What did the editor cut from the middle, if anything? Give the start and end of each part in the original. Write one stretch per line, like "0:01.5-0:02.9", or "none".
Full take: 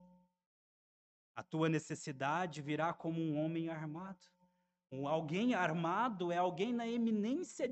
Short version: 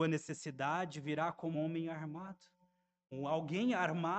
0:03.2-0:03.3